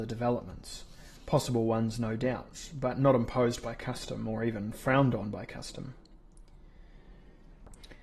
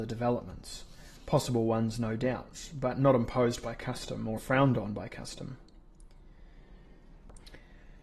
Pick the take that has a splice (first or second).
second